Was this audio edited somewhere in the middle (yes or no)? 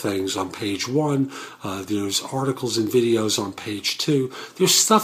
no